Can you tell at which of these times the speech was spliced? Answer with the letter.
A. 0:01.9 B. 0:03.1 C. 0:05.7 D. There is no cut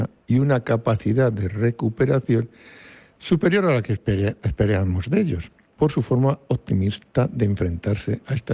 C